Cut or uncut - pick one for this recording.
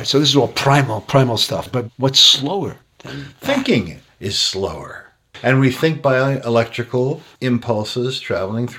uncut